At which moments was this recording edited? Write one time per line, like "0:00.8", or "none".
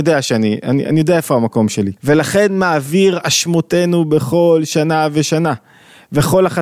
0:02.0